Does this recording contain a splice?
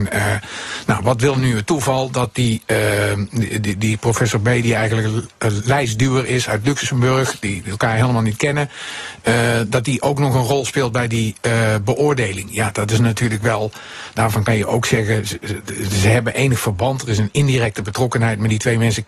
no; 0 cuts

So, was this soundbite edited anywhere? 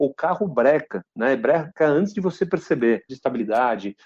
yes; 1 cut; at 3.1 s

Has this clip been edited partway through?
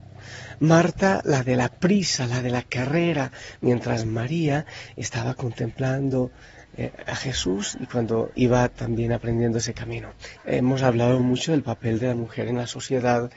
yes; 2 cuts; at 8.3 s, 10.4 s

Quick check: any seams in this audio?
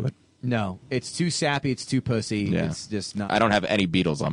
yes; 1 cut; at 3.3 s

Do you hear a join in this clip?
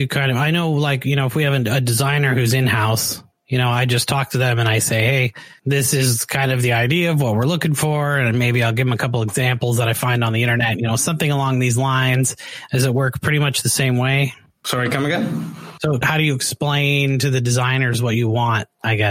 no; 0 cuts

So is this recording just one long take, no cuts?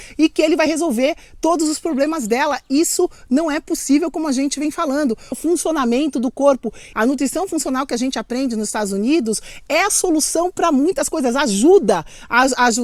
no; 2 cuts; at 5.3 s, 6.9 s

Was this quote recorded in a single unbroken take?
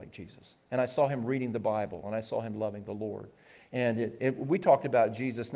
yes; 0 cuts

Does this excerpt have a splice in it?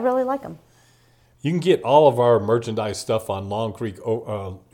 no; 0 cuts

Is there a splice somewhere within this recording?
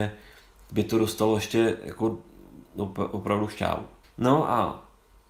yes; 1 cut; at 4.0 s

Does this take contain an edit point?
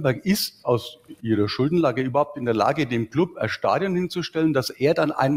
no; 0 cuts

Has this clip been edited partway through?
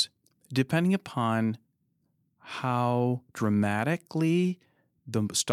no; 0 cuts

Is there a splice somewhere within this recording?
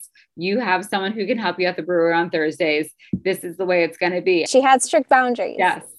yes; 1 cut; at 4.5 s

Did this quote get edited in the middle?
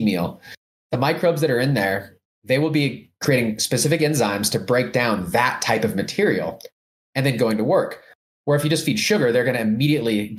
no; 0 cuts

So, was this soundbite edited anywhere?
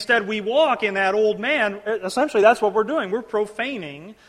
no; 0 cuts

